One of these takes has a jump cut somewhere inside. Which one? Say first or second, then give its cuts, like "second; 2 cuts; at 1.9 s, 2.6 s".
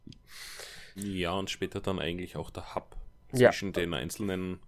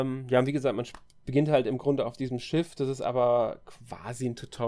first; 1 cut; at 1.0 s